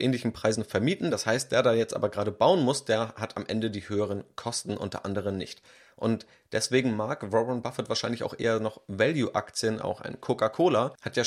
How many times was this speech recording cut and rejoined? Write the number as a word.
zero